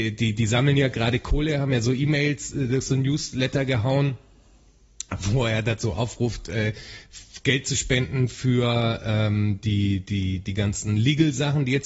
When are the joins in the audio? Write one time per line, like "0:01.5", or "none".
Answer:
none